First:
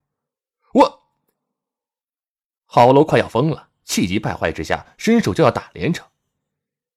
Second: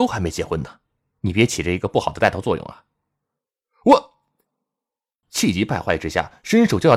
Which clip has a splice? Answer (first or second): second